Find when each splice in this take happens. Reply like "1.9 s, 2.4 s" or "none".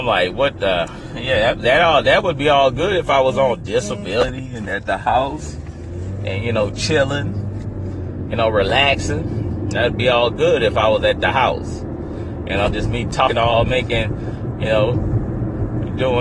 none